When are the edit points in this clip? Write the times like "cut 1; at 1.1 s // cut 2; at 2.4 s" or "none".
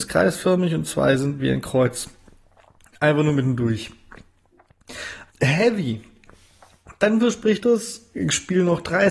cut 1; at 5.3 s